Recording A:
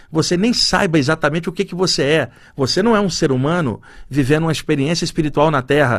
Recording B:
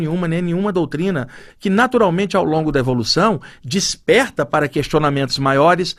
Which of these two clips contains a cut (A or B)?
B